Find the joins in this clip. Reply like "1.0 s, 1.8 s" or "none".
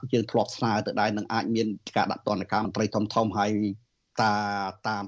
2.6 s